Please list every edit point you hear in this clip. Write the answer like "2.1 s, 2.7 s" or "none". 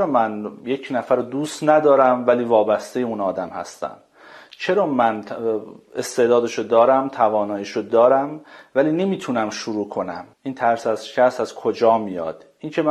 10.3 s